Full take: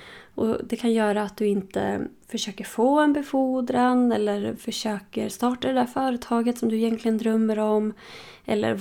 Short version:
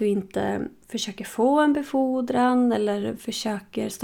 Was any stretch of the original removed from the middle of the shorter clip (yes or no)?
no